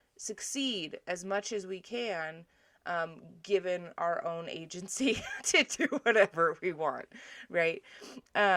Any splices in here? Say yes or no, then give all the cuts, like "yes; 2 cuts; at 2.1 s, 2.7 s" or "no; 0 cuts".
yes; 1 cut; at 5.4 s